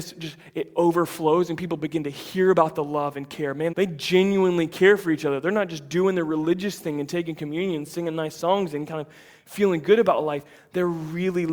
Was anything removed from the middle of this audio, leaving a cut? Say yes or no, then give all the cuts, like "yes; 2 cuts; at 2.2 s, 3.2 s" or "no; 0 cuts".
yes; 1 cut; at 3.7 s